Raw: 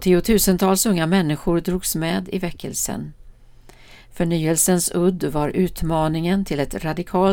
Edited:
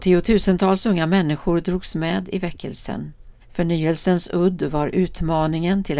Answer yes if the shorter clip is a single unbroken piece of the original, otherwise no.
no